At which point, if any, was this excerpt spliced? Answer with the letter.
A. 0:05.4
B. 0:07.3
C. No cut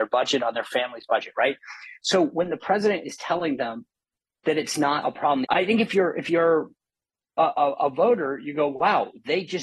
A